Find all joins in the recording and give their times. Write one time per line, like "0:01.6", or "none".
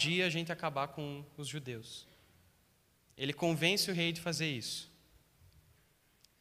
none